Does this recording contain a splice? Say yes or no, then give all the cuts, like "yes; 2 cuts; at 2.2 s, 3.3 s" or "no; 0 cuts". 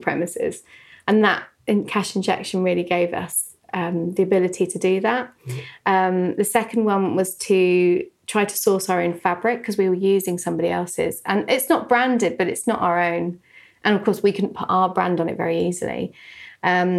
no; 0 cuts